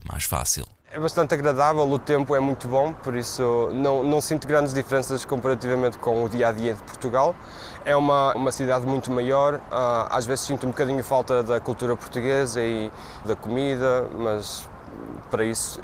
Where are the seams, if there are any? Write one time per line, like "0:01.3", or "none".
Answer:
0:08.3
0:13.2